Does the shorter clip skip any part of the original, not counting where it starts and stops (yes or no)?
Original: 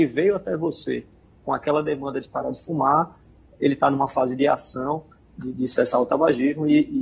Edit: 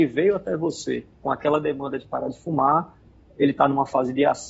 yes